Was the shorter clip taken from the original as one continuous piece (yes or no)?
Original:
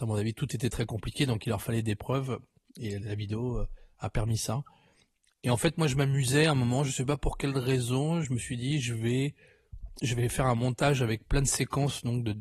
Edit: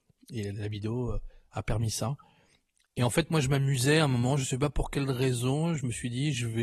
yes